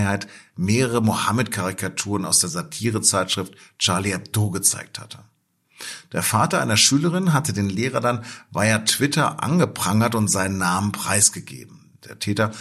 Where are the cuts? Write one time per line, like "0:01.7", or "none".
none